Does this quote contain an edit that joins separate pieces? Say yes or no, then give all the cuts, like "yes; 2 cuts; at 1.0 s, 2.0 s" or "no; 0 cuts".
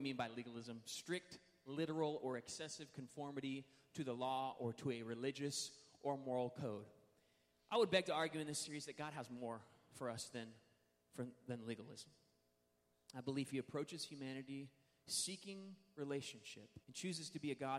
yes; 1 cut; at 16.8 s